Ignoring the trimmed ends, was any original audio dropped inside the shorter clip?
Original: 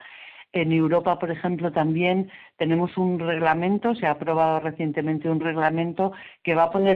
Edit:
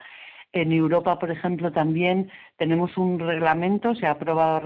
no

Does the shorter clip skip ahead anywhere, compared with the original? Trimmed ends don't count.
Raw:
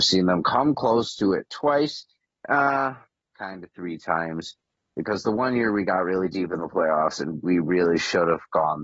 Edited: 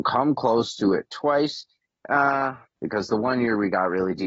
yes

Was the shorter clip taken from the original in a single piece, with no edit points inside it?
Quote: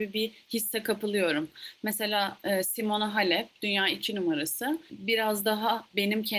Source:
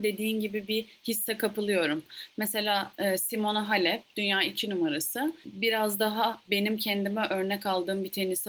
yes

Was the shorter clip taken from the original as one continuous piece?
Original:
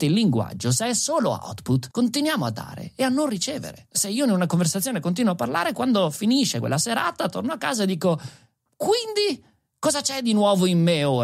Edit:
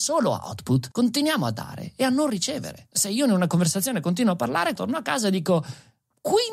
no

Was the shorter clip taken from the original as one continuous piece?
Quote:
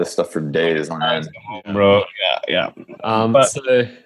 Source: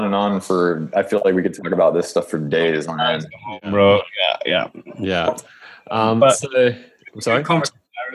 no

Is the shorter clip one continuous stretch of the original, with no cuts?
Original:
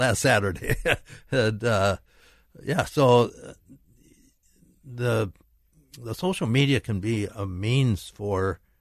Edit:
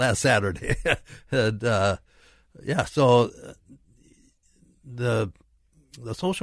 yes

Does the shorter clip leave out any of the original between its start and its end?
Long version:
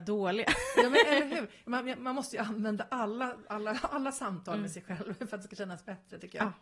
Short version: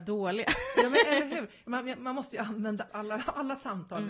yes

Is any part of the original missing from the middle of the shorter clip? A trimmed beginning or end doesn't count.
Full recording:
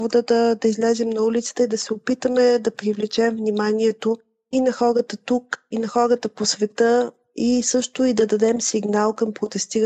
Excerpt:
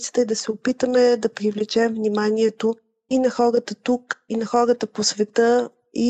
no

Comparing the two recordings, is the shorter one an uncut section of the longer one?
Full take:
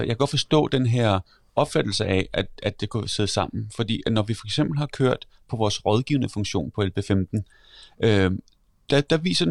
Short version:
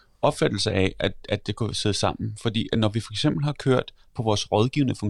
yes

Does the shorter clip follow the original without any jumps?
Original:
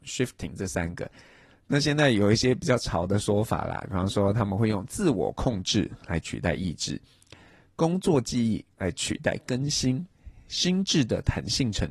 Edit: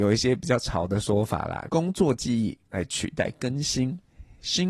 no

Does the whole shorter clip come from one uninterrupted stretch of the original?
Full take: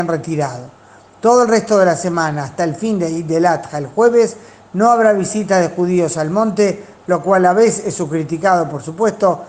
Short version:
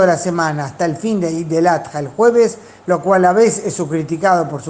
no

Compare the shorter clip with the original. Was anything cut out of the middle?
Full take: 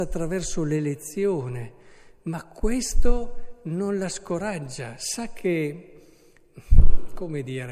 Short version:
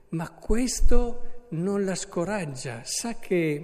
no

